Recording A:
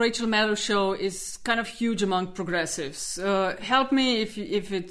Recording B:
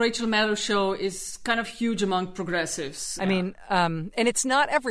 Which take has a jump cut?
B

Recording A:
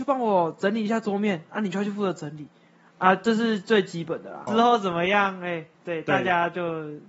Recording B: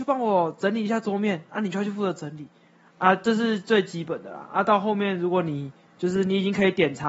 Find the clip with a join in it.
A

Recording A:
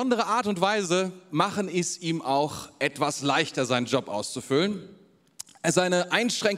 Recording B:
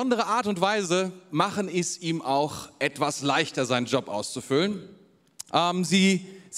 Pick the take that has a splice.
B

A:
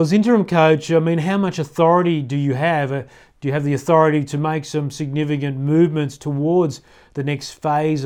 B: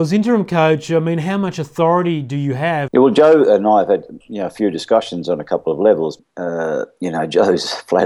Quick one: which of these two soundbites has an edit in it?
B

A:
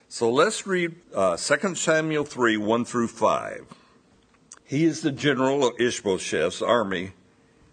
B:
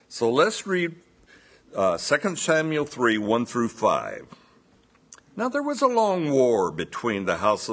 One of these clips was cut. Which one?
A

